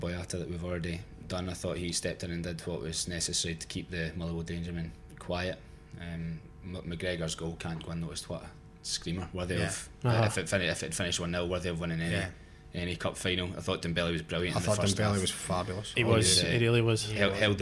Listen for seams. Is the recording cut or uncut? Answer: uncut